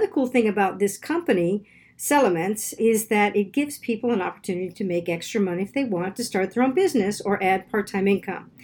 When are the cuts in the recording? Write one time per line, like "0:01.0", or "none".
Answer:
0:02.8